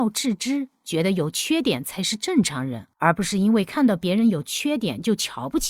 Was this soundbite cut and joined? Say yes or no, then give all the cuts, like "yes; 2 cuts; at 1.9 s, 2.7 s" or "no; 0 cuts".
yes; 1 cut; at 2.9 s